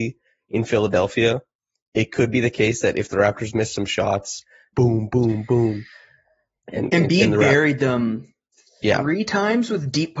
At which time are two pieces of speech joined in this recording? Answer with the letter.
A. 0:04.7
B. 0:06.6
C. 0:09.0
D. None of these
A